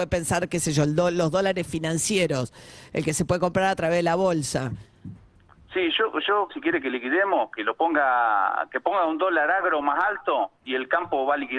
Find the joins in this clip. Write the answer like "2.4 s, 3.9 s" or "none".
6.5 s